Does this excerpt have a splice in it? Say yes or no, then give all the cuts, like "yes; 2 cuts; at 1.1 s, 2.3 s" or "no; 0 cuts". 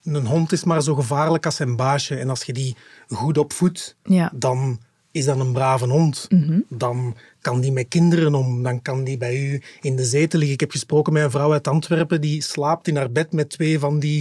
no; 0 cuts